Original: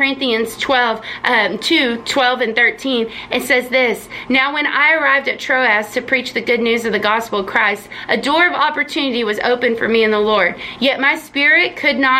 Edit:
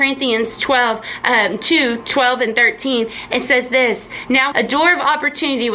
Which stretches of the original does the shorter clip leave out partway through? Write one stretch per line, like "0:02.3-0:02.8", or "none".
0:04.5-0:08.1